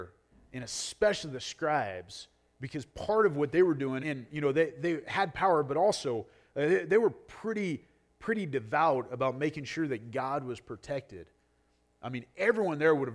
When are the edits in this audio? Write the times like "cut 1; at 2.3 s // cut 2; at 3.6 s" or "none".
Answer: cut 1; at 4.0 s

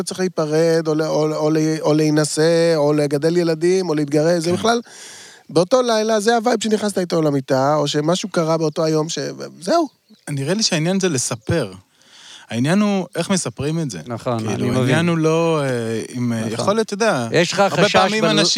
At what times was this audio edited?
none

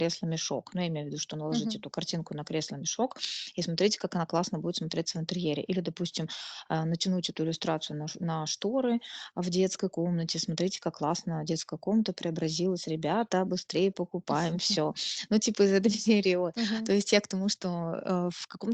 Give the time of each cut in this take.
none

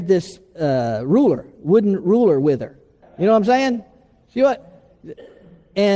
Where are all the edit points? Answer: cut 1; at 3.0 s

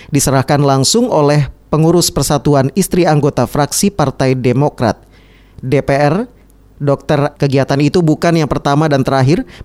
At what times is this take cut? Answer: cut 1; at 7.4 s

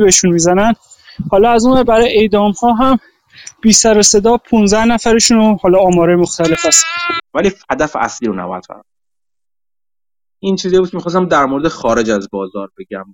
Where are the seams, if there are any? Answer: cut 1; at 7.2 s

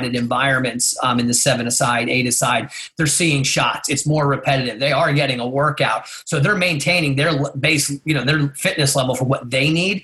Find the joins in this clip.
none

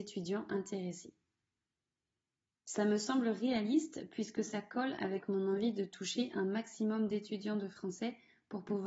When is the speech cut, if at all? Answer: none

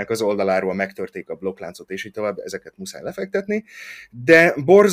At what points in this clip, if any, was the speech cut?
none

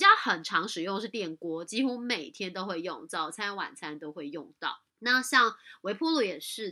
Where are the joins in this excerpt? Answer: cut 1; at 4.9 s

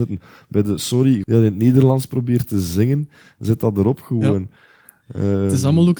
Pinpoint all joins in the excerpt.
cut 1; at 1.2 s

